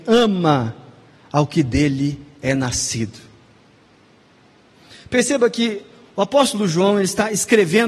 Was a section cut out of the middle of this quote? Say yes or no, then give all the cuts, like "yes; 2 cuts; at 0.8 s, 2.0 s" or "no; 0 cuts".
no; 0 cuts